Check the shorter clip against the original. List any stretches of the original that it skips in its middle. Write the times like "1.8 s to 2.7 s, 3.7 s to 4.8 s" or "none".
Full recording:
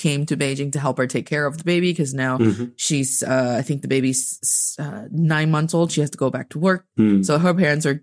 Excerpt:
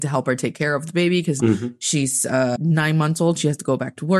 2.1 s to 2.4 s, 3.5 s to 5.1 s